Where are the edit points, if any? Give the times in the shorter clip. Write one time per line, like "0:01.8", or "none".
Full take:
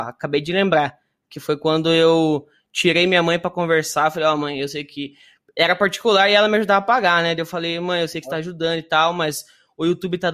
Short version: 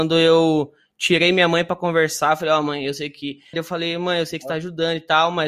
0:03.5